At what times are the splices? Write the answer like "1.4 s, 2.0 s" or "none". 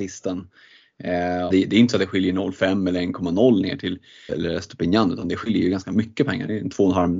1.5 s, 4.3 s